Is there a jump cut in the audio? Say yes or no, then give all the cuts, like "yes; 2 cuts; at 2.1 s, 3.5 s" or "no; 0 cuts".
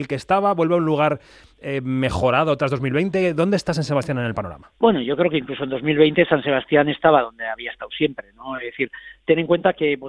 yes; 1 cut; at 4.8 s